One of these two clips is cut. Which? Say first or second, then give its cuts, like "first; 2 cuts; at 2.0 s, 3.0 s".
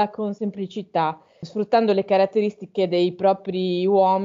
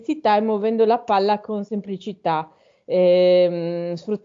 first; 1 cut; at 1.4 s